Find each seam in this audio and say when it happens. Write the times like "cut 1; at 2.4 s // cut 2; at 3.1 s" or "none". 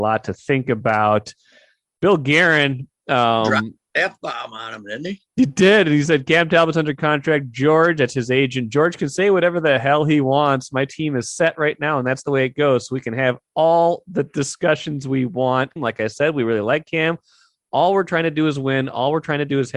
cut 1; at 15.8 s